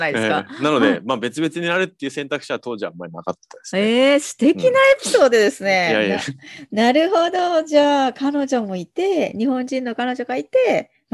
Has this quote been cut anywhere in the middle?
no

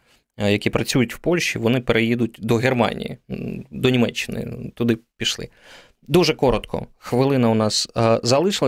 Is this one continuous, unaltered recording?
yes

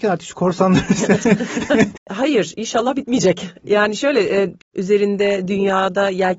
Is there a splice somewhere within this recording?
yes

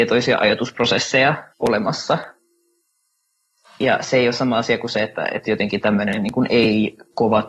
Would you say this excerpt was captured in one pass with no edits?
no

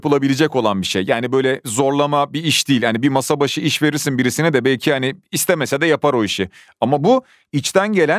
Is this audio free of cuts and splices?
yes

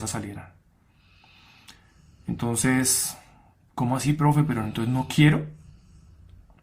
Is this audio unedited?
yes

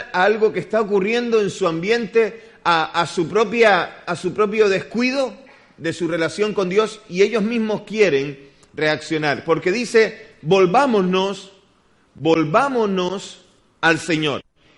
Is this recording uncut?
yes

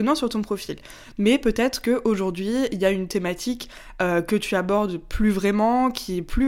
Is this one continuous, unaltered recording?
no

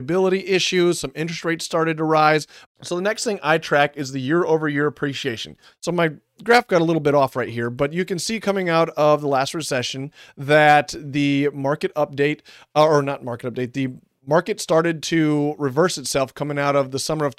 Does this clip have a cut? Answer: yes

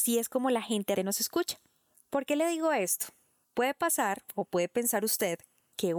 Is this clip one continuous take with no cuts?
no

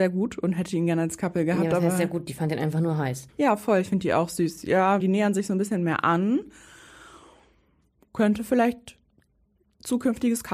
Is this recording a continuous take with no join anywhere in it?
no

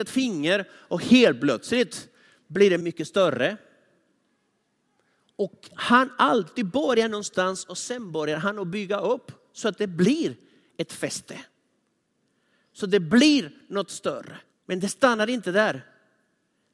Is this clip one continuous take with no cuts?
no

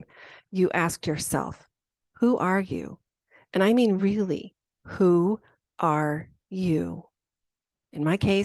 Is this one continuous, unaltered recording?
yes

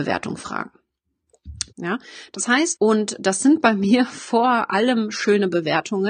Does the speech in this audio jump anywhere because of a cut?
yes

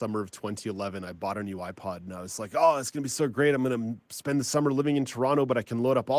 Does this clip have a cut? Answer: no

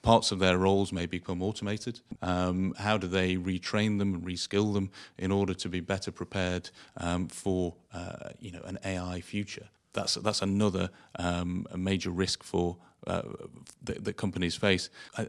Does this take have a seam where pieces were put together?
yes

